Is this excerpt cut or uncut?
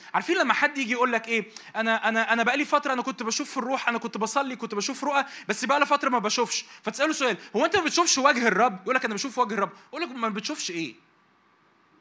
uncut